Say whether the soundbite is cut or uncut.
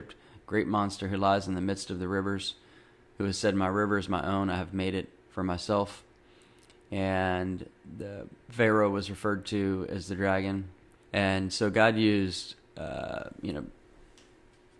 cut